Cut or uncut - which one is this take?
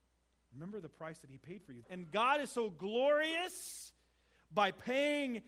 cut